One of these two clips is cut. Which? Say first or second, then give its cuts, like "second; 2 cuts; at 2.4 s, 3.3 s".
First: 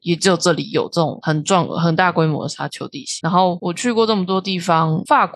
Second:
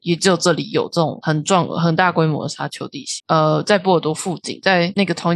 second; 1 cut; at 3.2 s